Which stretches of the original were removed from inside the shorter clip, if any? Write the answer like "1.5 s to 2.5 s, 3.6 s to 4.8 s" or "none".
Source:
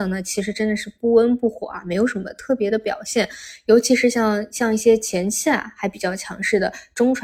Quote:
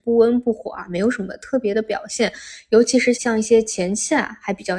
4.1 s to 4.5 s